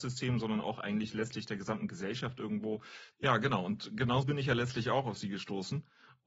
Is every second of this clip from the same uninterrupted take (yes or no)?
no